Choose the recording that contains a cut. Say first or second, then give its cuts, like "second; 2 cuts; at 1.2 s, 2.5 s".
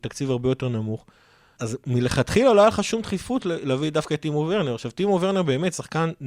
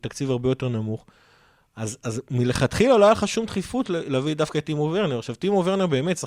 first; 1 cut; at 1.6 s